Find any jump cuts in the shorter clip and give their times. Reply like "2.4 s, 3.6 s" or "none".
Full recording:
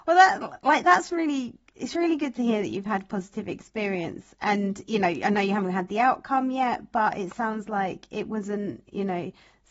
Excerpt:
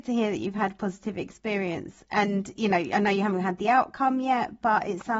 none